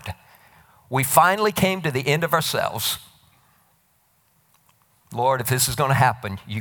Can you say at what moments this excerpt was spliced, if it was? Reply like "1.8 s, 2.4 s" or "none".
none